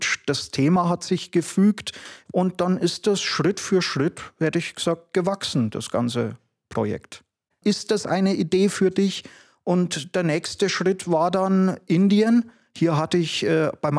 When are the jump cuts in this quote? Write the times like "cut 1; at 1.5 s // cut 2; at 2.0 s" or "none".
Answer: cut 1; at 7.6 s